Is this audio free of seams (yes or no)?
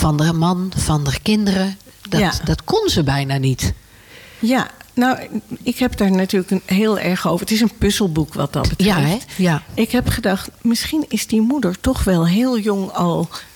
yes